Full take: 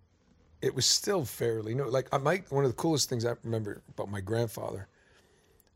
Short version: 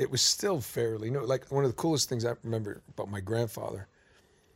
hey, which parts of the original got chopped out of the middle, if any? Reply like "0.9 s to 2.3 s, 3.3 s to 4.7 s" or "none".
2.1 s to 2.4 s

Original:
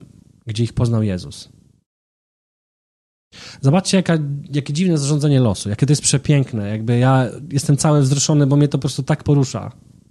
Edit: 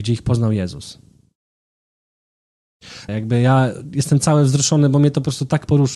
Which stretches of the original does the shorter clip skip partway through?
3.6 s to 6.7 s

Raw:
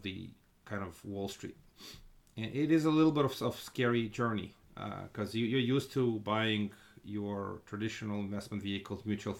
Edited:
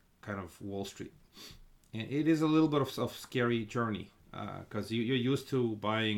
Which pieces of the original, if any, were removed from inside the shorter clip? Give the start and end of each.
none

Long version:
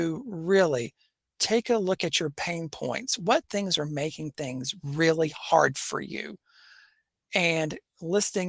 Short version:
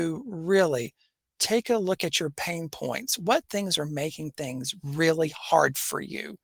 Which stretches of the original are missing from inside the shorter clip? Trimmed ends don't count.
none

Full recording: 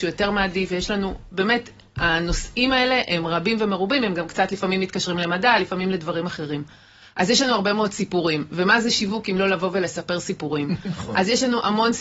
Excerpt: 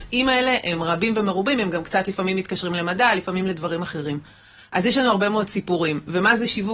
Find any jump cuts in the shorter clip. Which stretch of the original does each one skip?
none

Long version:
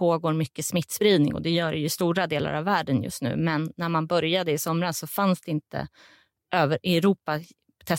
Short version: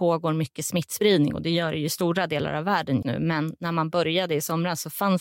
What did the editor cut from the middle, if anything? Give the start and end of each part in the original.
3.0 s to 3.2 s

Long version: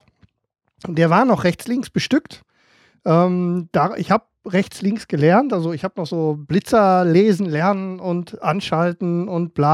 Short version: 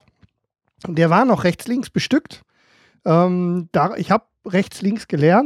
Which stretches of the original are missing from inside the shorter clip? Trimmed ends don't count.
none

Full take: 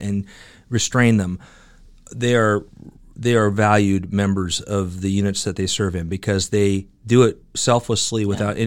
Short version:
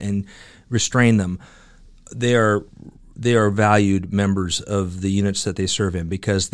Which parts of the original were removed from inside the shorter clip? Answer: none

